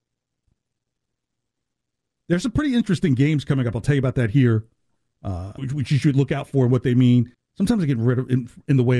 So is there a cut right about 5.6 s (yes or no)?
yes